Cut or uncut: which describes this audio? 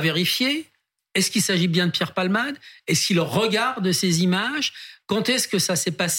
uncut